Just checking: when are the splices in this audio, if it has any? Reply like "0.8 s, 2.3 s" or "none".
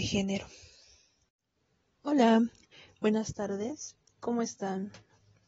none

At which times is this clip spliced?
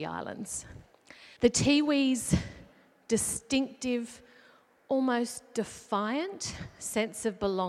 1.4 s

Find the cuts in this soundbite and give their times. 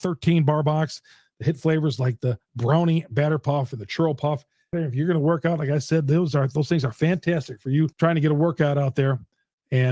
4.7 s, 7.9 s

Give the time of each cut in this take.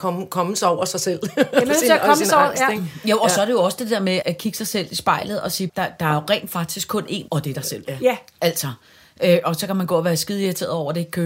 4.2 s, 5.7 s, 7.3 s

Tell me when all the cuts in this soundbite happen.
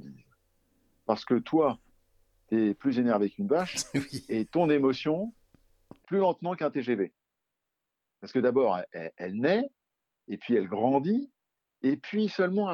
6.0 s

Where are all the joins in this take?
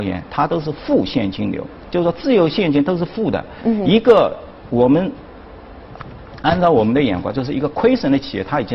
none

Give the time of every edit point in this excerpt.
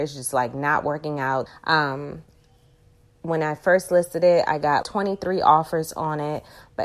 1.5 s, 4.8 s

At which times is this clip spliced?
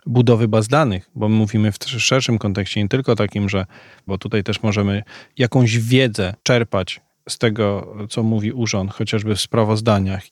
4.1 s, 6.4 s

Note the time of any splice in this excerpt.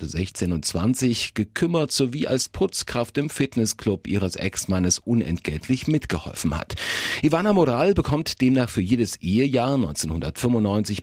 none

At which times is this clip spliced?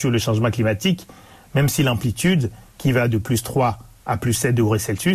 none

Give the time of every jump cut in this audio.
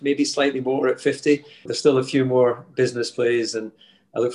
1.7 s

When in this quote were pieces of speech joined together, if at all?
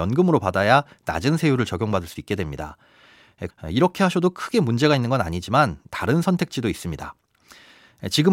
3.5 s

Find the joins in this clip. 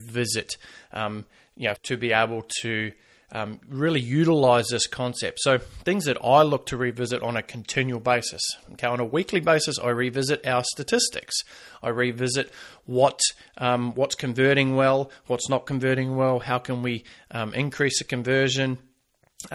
1.8 s

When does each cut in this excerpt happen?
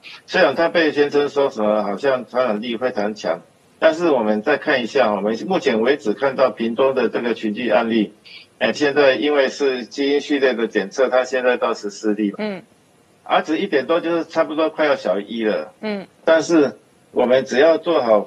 8.7 s, 12.3 s, 16.2 s

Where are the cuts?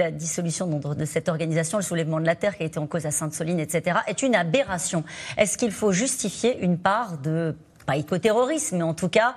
none

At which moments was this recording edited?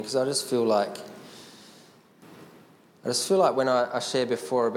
none

